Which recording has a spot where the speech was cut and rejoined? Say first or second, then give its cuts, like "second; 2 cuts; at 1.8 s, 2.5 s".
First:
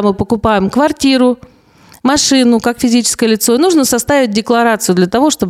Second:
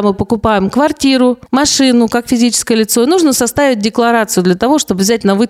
second; 1 cut; at 1.5 s